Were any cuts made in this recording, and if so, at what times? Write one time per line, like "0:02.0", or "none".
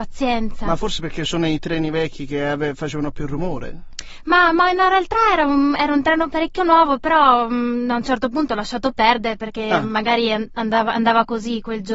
none